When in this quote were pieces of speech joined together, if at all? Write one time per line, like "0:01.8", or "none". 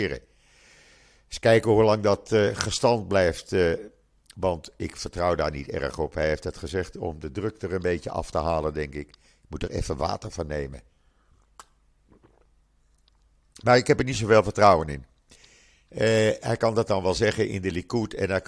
none